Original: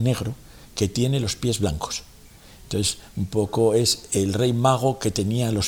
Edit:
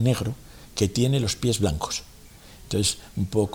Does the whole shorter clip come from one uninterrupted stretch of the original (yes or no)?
yes